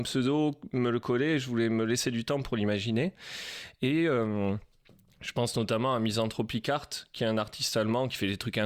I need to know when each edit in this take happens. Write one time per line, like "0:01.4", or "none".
none